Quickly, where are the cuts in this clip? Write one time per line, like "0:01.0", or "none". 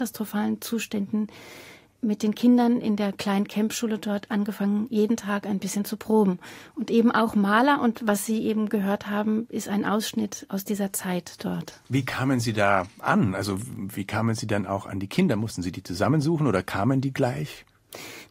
0:11.8